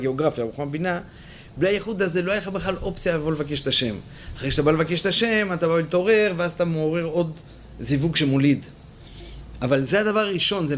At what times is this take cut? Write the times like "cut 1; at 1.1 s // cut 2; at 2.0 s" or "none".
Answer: none